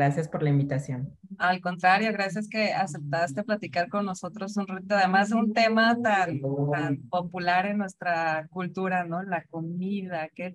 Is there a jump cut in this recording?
no; 0 cuts

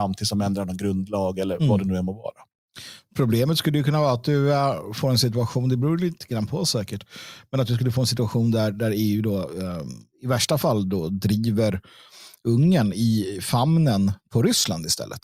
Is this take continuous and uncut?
yes; 0 cuts

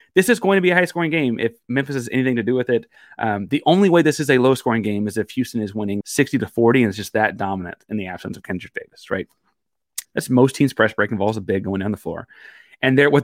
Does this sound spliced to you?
yes; 2 cuts; at 6.0 s, 10.0 s

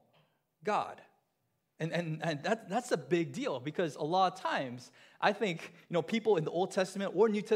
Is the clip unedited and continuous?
yes; 0 cuts

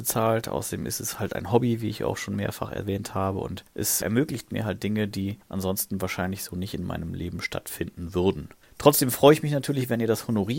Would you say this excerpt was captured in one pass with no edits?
yes; 0 cuts

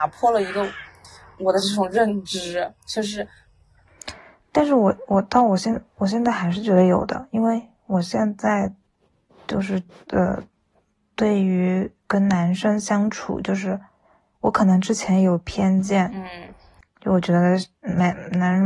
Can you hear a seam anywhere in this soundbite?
no; 0 cuts

